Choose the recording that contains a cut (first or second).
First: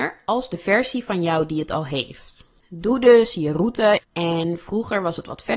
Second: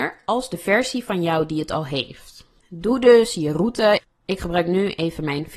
first